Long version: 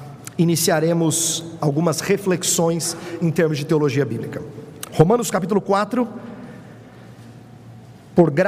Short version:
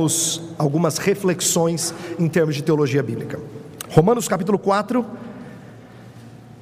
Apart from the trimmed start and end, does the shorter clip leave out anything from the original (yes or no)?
no